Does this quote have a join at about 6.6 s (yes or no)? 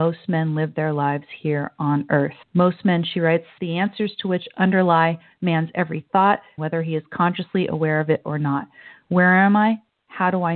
yes